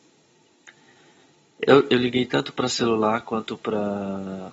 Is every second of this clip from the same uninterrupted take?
yes; 0 cuts

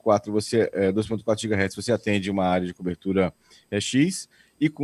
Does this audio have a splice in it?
no; 0 cuts

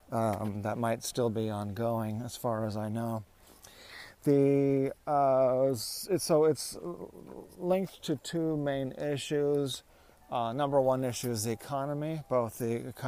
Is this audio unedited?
yes; 0 cuts

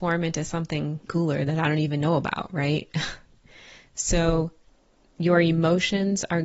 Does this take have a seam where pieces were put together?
yes; 1 cut; at 1.1 s

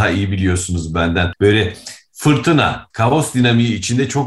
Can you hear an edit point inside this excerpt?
yes; 2 cuts; at 1.3 s, 2.9 s

